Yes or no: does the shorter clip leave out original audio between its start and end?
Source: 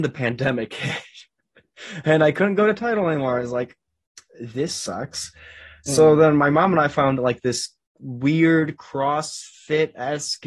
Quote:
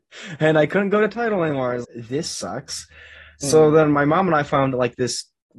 yes